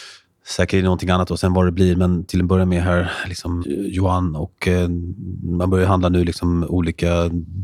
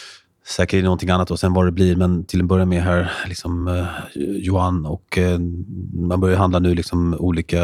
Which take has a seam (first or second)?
first